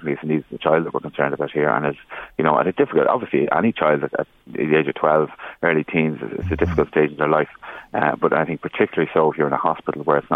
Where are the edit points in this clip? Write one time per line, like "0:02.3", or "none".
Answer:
none